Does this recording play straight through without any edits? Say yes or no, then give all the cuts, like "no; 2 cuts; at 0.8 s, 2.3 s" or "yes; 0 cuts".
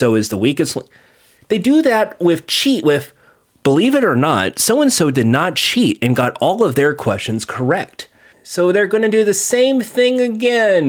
no; 1 cut; at 8.3 s